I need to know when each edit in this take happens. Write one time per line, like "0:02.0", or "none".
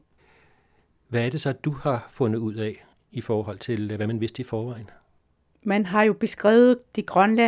none

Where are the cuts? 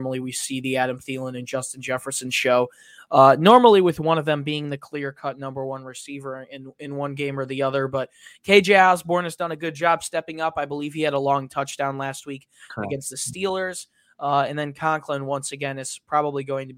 none

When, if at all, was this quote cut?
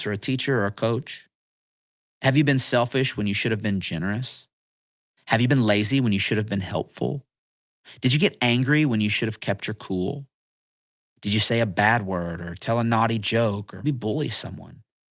0:13.8

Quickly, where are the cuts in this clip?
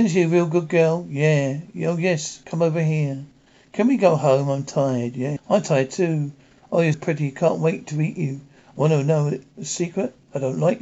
0:05.4
0:06.9

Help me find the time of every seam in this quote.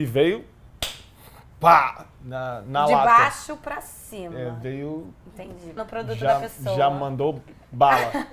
0:05.8

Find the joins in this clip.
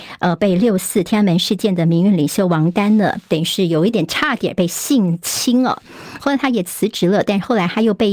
0:03.9
0:06.2

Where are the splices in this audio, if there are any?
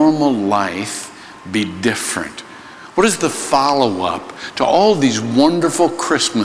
none

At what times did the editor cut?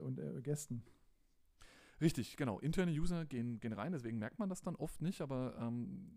none

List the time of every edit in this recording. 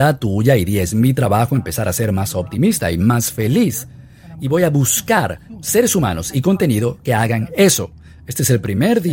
none

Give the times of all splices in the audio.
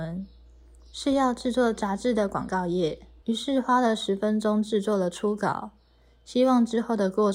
0:03.2

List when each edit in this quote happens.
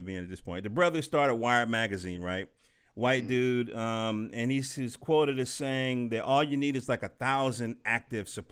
none

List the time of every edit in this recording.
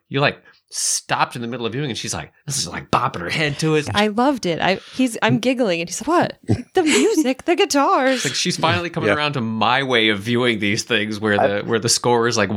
0:02.4
0:03.8
0:06.0

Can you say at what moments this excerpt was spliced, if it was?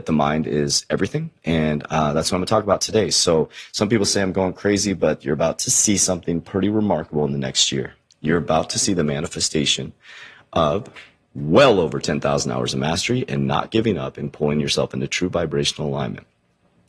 none

